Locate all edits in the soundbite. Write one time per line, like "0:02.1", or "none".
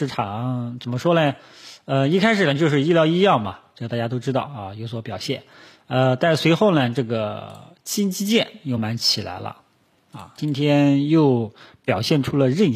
0:08.8
0:10.4